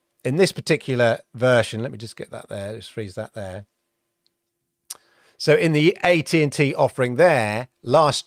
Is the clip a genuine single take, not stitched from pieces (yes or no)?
yes